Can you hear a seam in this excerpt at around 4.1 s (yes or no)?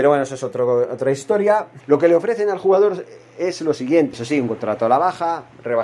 yes